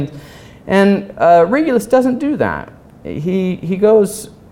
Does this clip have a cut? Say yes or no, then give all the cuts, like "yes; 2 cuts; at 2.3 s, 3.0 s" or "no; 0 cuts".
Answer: no; 0 cuts